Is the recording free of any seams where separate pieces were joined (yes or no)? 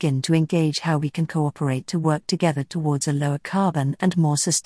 yes